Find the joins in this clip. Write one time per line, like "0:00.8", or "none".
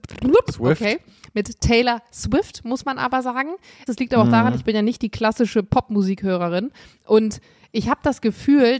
0:03.9